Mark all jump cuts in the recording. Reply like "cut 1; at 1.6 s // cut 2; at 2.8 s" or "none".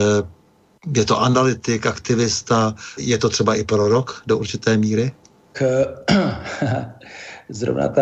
cut 1; at 3.0 s // cut 2; at 5.5 s